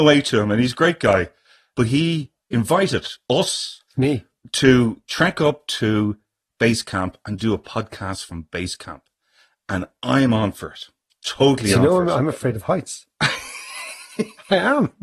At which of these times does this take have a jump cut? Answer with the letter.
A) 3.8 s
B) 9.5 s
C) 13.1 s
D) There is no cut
D